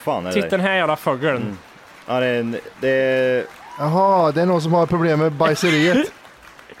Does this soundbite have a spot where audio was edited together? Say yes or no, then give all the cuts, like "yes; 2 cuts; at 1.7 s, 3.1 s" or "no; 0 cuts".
no; 0 cuts